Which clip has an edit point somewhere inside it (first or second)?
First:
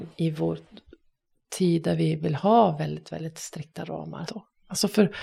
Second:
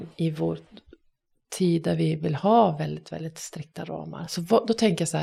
first